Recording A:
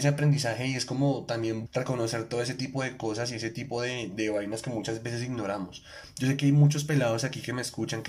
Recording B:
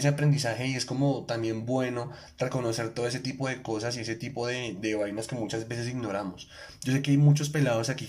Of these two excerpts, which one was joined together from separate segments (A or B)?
A